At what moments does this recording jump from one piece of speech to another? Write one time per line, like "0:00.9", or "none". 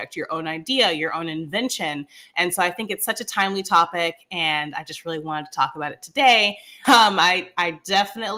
0:06.8